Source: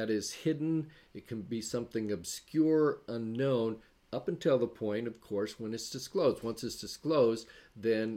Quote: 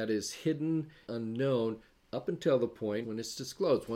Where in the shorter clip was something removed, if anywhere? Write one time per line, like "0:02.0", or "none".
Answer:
0:01.1
0:03.0